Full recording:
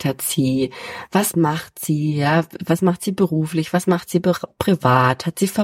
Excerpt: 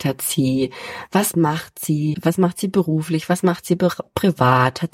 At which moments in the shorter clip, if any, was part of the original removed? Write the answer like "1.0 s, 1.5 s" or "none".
2.1 s